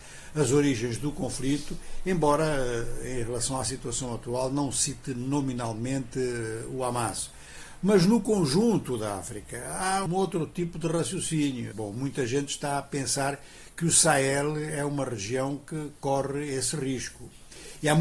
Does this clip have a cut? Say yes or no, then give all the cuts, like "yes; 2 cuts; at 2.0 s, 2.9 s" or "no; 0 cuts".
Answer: yes; 2 cuts; at 10.1 s, 11.7 s